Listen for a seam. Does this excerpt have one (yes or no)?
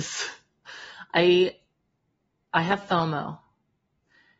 no